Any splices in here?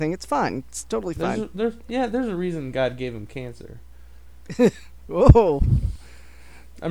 no; 0 cuts

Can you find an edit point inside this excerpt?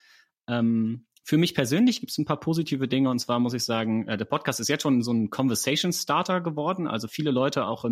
no; 0 cuts

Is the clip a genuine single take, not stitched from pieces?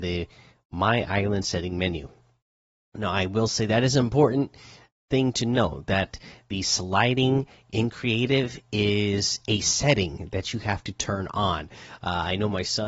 yes; 0 cuts

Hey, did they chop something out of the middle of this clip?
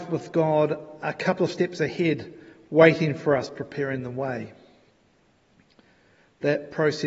no; 0 cuts

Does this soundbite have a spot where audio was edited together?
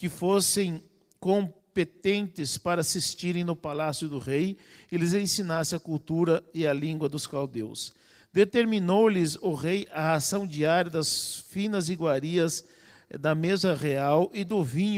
no; 0 cuts

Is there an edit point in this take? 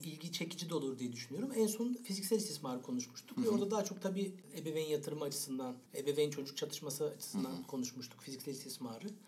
yes; 1 cut; at 5.9 s

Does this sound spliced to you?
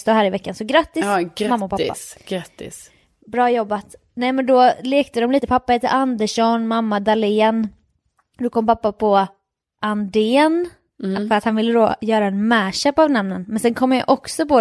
no; 0 cuts

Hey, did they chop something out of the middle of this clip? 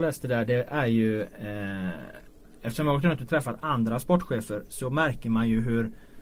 no; 0 cuts

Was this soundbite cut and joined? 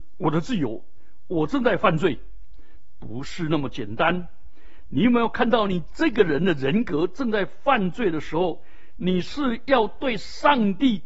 no; 0 cuts

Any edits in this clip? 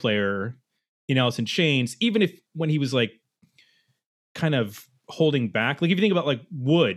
no; 0 cuts

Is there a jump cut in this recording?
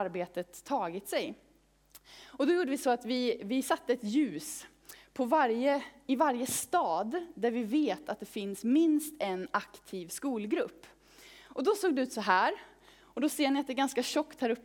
no; 0 cuts

